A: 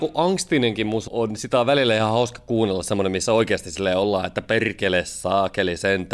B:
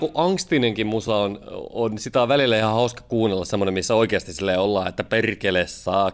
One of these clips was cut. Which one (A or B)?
A